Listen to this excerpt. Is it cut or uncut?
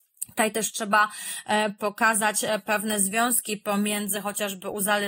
uncut